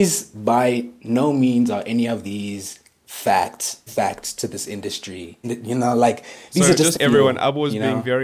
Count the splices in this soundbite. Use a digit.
3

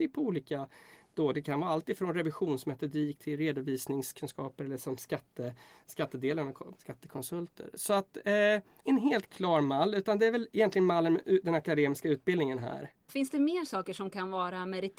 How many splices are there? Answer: 3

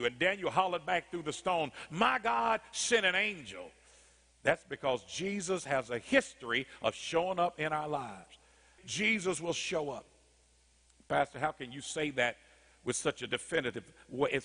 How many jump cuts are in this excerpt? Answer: 1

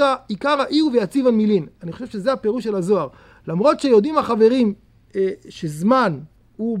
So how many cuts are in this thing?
0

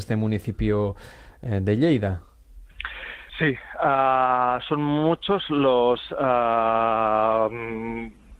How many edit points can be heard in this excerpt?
1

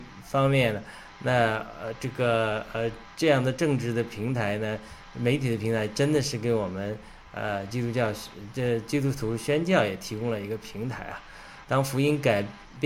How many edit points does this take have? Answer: 1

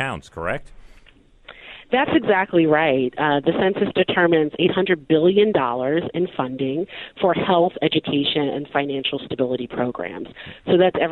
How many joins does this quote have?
0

